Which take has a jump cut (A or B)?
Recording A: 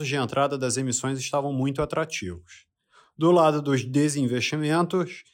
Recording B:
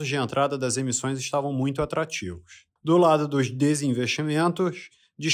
B